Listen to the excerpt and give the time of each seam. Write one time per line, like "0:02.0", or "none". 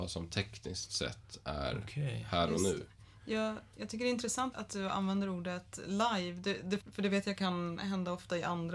0:04.5
0:06.8